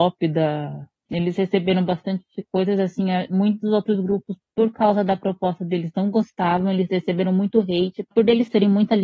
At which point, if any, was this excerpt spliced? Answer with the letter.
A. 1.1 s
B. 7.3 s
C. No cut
A